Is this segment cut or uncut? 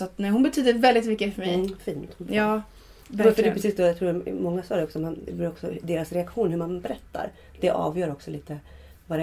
uncut